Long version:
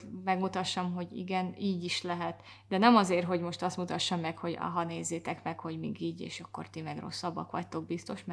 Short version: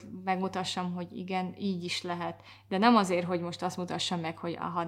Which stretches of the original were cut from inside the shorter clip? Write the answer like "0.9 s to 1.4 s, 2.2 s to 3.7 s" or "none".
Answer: none